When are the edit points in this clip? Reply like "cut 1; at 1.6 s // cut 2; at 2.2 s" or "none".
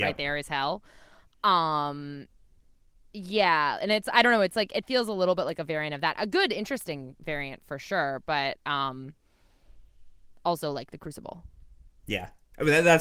none